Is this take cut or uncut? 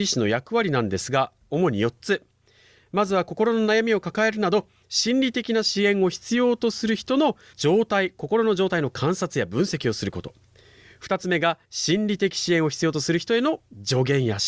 cut